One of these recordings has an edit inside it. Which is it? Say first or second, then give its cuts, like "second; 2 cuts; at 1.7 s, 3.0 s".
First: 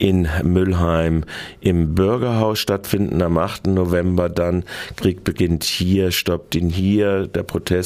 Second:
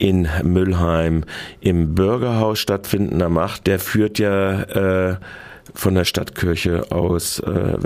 second; 1 cut; at 3.6 s